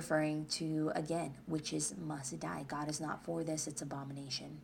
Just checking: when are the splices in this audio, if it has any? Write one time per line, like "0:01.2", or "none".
none